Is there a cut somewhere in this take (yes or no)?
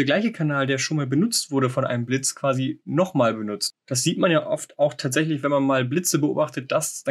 no